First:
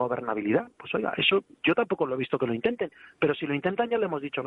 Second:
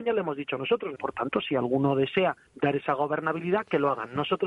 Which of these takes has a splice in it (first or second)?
second